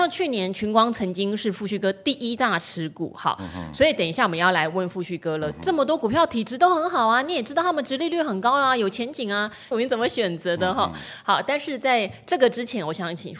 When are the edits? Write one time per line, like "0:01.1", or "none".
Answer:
0:09.7